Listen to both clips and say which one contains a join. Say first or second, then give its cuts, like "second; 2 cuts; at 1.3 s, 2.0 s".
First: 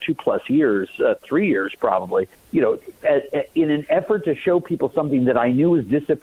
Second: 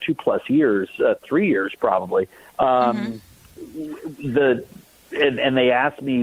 first; 1 cut; at 2.3 s